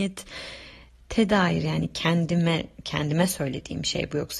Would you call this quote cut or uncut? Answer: uncut